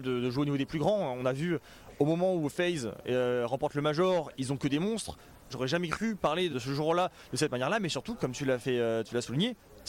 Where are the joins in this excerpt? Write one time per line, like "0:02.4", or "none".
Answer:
0:05.5
0:06.5